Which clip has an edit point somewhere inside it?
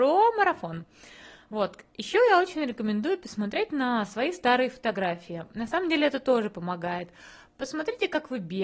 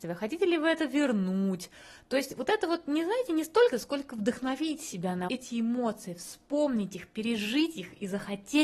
second; 2 cuts; at 3.7 s, 5.3 s

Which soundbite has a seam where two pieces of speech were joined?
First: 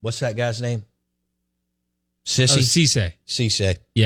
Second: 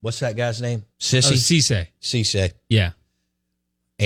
second; 1 cut; at 0.9 s

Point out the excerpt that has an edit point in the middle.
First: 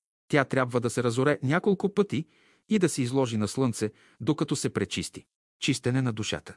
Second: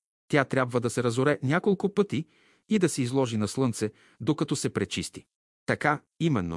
first; 1 cut; at 5.5 s

